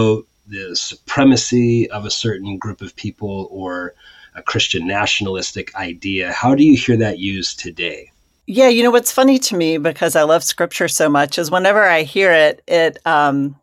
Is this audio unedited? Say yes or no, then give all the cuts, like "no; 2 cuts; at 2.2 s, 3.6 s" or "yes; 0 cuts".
yes; 0 cuts